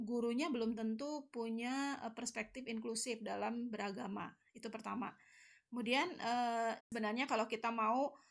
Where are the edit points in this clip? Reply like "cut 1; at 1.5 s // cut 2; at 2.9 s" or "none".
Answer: cut 1; at 6.8 s